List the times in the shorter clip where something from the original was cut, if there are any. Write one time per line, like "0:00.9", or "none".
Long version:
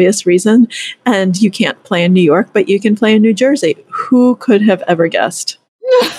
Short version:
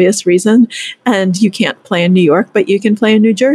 none